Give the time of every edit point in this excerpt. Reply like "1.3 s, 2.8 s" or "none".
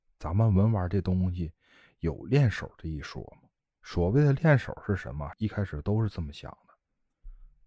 5.3 s

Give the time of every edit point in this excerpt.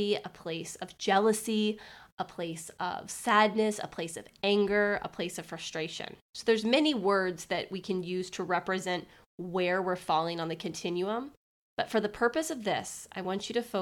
6.2 s

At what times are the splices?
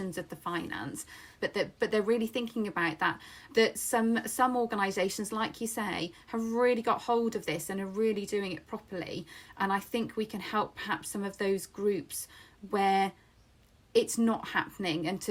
1.4 s, 3.5 s

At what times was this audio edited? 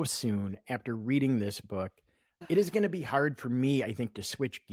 none

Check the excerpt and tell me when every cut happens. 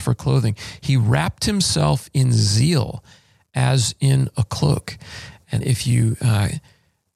5.6 s

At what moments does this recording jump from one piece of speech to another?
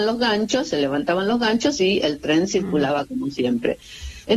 none

